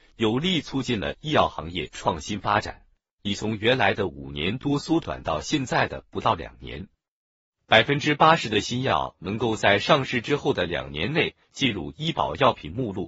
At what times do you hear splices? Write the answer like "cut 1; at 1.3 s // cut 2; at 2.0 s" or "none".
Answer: cut 1; at 3.2 s